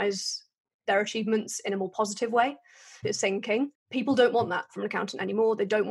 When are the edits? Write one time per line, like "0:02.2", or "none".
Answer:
0:03.0